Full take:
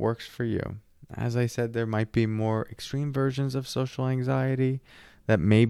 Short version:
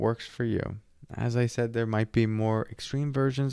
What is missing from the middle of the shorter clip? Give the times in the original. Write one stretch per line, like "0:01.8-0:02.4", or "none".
none